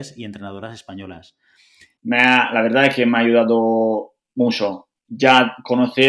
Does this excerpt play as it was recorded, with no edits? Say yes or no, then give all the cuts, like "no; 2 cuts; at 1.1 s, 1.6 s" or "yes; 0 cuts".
no; 1 cut; at 2.0 s